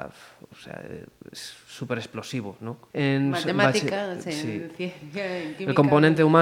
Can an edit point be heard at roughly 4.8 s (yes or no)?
no